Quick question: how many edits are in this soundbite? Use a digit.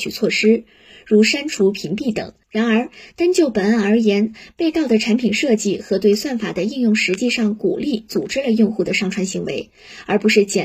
1